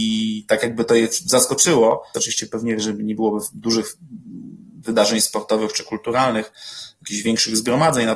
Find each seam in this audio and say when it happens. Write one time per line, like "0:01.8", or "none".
0:02.1